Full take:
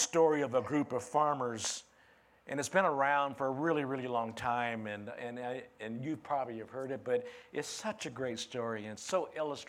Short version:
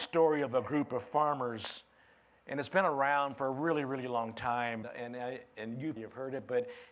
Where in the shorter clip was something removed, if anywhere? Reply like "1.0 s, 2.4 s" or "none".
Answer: 4.8 s, 6.0 s

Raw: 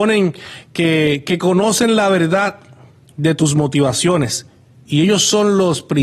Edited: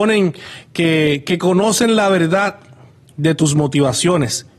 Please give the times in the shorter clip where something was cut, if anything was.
none

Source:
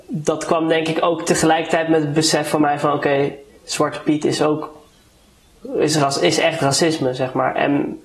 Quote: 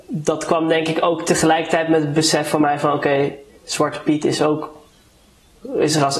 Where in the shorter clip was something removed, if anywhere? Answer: none

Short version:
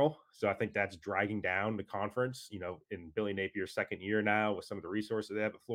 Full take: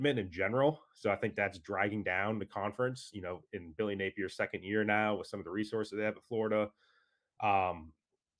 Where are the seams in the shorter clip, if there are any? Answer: none

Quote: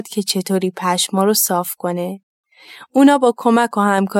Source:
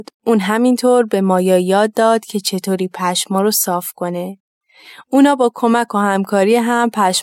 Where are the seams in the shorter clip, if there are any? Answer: none

